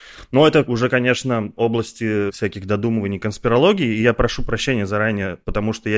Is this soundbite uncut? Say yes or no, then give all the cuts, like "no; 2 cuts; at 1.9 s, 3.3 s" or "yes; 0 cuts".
yes; 0 cuts